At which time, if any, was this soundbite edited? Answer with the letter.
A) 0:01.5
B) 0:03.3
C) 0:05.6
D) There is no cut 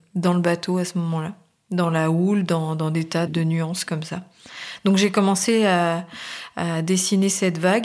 B